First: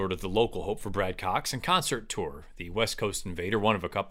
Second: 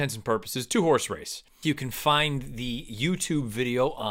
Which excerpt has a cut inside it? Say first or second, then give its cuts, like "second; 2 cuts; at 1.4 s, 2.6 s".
second; 1 cut; at 1.6 s